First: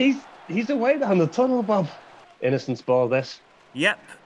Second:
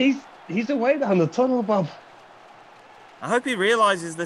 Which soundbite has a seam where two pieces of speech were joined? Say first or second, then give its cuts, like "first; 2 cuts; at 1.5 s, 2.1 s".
first; 1 cut; at 2.2 s